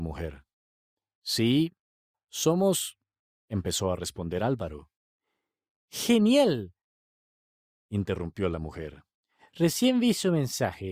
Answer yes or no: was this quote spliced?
no